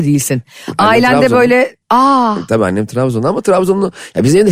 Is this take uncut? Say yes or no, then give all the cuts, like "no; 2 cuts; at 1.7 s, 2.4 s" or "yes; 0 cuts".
no; 1 cut; at 1.8 s